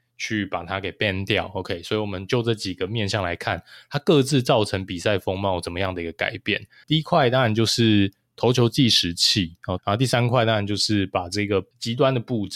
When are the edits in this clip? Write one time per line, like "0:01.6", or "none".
0:06.8
0:09.8